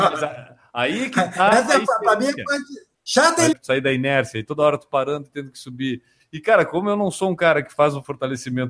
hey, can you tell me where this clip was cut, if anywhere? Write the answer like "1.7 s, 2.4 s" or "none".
3.5 s, 6.2 s